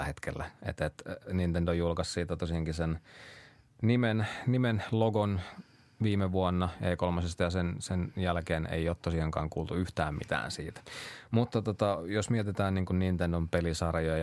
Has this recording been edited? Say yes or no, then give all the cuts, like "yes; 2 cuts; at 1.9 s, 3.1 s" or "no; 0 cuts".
no; 0 cuts